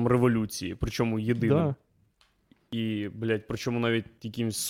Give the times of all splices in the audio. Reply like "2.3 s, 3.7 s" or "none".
none